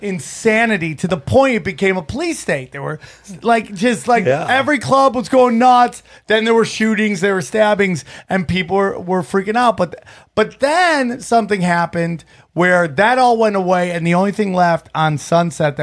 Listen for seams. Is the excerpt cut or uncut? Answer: uncut